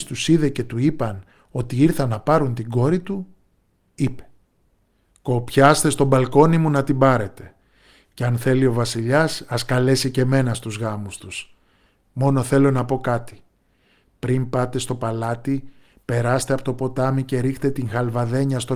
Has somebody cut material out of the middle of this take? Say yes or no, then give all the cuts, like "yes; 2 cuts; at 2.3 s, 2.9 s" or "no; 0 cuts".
no; 0 cuts